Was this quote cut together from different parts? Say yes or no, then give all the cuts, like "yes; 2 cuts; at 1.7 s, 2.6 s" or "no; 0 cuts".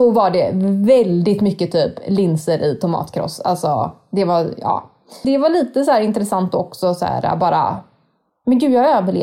yes; 1 cut; at 5.2 s